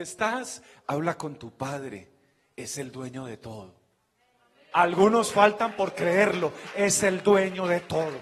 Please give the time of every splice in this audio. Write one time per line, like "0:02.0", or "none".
0:04.7